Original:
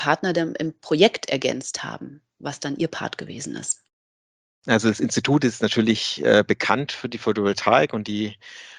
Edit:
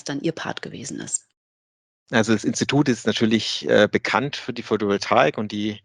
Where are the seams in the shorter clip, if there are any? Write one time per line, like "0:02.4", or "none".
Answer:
none